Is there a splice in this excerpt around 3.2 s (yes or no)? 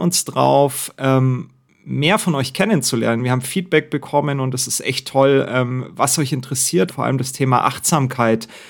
no